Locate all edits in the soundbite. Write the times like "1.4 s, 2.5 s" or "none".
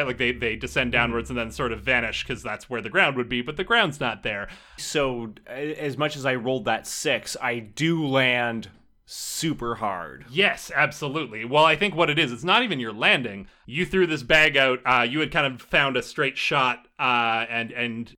4.8 s